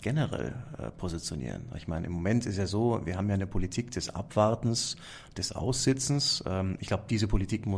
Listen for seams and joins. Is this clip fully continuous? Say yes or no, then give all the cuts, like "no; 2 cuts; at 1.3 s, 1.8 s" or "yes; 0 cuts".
yes; 0 cuts